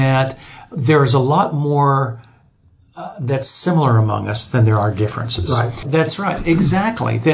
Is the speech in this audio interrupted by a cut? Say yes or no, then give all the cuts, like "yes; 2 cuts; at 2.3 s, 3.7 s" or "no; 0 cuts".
yes; 1 cut; at 5.8 s